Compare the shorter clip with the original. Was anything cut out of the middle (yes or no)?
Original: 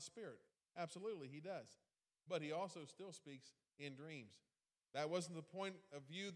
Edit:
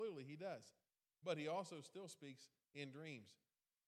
no